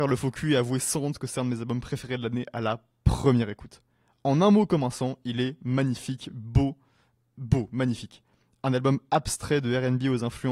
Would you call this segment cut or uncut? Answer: uncut